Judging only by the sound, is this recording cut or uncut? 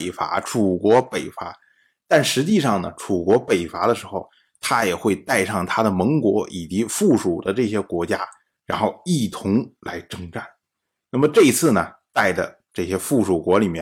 uncut